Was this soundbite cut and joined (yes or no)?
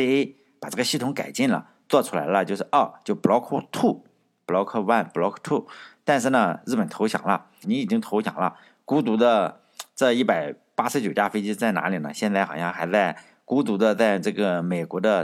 yes